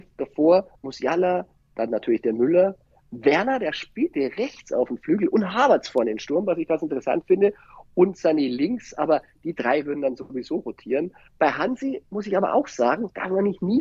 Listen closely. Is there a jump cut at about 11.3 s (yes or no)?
yes